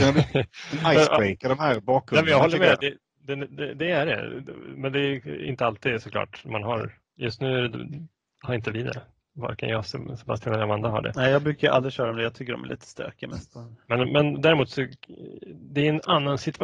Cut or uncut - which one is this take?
uncut